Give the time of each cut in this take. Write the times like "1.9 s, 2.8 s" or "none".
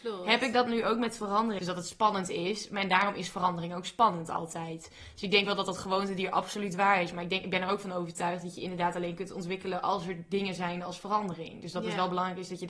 1.6 s